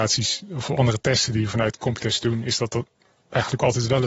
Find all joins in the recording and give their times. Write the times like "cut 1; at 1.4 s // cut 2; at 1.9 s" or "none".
none